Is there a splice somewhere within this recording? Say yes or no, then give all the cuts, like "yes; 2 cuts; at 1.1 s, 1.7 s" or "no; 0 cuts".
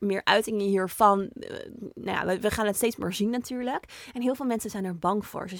no; 0 cuts